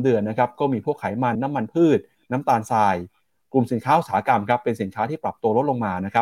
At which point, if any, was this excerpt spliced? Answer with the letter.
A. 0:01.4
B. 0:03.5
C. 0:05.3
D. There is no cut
A